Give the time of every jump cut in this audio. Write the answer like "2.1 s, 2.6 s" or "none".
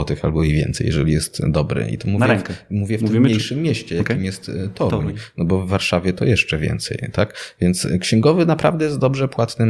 none